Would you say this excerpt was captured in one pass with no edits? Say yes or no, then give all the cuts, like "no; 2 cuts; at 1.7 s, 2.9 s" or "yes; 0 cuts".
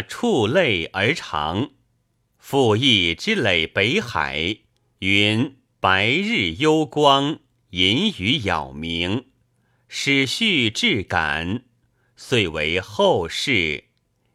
yes; 0 cuts